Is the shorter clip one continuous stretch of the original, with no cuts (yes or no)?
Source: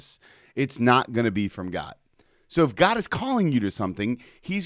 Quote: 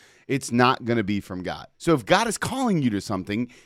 no